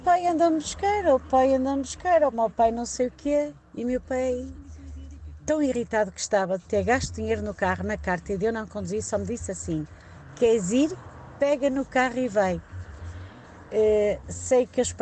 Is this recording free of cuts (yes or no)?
no